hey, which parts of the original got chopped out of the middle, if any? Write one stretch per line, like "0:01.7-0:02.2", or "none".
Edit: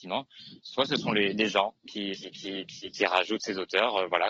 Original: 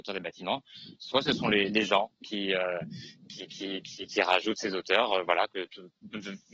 0:02.5-0:03.3